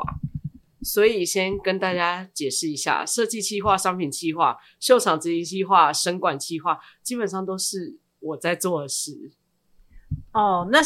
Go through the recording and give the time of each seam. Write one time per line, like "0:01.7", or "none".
none